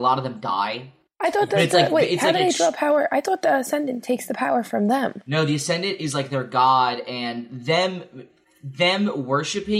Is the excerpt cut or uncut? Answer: uncut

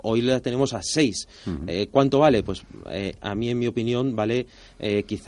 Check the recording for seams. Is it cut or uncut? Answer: uncut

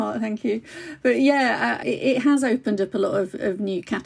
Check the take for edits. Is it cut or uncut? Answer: cut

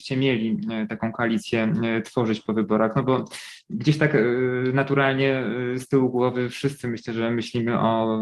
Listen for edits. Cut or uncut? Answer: uncut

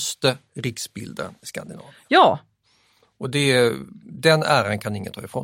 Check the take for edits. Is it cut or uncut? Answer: uncut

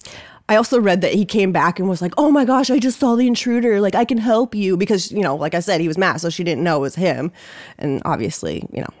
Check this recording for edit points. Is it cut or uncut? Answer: uncut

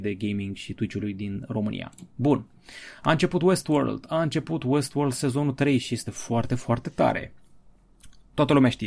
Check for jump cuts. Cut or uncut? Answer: uncut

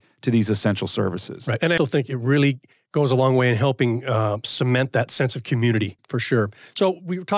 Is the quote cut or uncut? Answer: cut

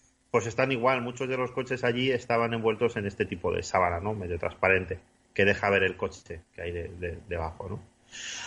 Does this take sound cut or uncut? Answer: uncut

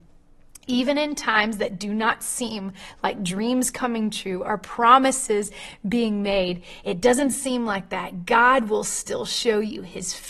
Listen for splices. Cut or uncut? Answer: uncut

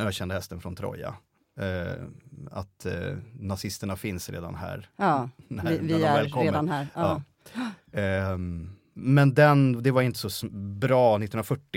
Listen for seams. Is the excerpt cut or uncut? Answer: uncut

